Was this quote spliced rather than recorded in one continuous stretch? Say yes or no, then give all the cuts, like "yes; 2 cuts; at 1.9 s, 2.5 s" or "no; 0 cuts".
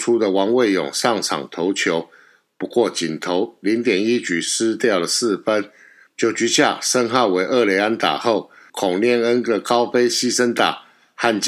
yes; 2 cuts; at 6.1 s, 8.7 s